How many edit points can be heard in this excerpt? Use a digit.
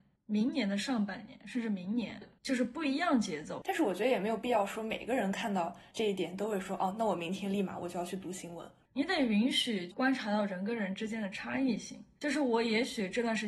2